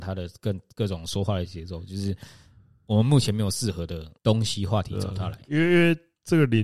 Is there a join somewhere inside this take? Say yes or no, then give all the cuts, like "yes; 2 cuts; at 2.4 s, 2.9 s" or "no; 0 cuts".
yes; 1 cut; at 4.2 s